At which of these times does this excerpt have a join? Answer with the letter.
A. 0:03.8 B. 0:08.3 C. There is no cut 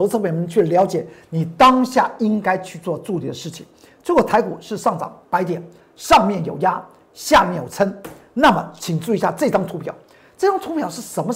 C